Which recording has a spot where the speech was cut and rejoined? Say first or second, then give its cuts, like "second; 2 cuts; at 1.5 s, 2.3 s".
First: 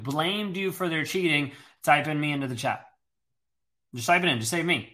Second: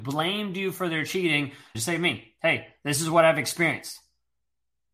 second; 1 cut; at 1.7 s